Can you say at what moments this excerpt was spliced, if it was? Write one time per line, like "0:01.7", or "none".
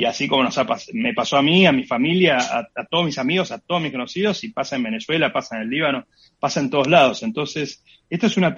none